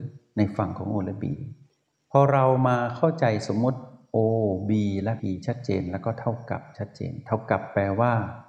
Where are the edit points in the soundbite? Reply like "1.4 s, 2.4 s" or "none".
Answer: 5.2 s